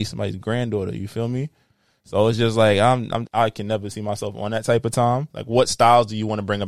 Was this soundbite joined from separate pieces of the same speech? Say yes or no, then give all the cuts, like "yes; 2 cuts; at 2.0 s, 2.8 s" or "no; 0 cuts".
yes; 2 cuts; at 3.3 s, 5.3 s